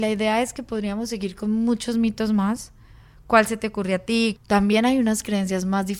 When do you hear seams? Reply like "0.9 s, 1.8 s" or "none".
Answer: 4.4 s